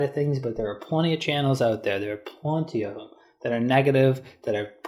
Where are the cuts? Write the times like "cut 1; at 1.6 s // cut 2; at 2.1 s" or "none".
none

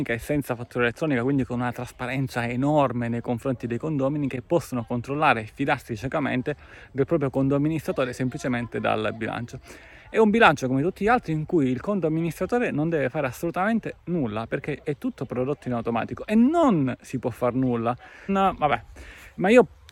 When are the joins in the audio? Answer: cut 1; at 18.3 s

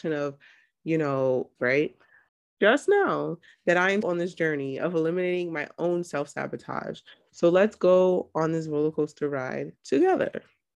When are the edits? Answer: cut 1; at 1.6 s // cut 2; at 4.0 s

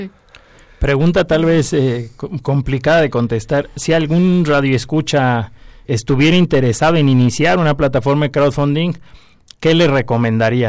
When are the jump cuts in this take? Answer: cut 1; at 5.8 s

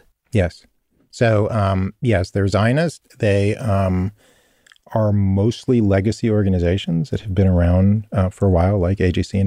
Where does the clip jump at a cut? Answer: none

